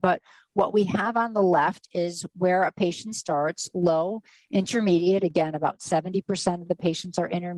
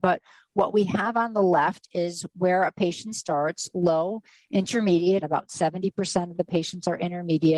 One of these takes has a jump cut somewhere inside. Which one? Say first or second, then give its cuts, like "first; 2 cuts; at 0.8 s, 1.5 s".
second; 1 cut; at 5.2 s